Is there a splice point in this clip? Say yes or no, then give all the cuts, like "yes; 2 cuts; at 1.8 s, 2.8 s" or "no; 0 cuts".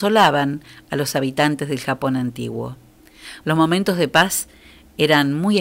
yes; 1 cut; at 3.4 s